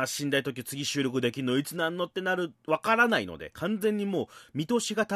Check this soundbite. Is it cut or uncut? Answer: uncut